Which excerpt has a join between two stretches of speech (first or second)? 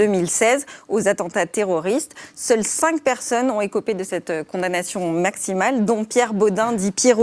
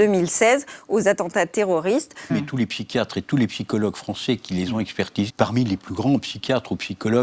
second